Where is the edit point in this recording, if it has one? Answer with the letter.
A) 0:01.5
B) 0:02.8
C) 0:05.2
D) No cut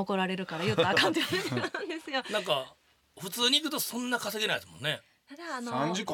D